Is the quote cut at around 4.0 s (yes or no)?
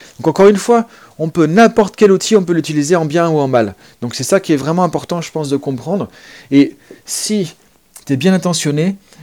no